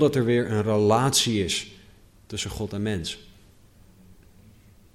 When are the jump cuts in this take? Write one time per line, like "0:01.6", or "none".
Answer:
none